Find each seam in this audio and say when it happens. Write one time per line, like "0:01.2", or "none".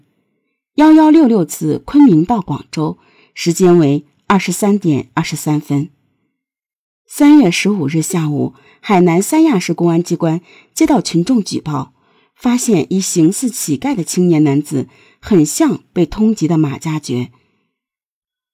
none